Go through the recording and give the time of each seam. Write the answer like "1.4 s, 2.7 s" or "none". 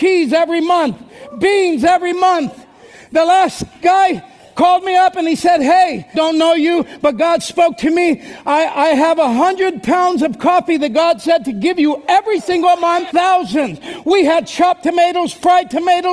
6.1 s, 13.1 s